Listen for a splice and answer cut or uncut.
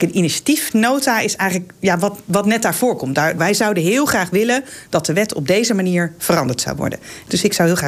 cut